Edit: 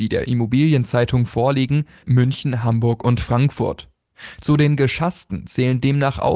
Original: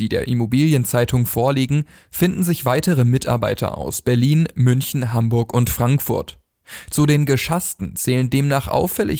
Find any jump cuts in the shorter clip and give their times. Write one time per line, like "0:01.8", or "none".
0:02.0